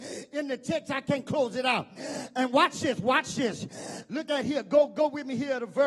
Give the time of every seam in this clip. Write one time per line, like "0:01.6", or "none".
none